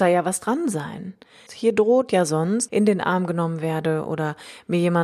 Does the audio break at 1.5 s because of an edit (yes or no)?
yes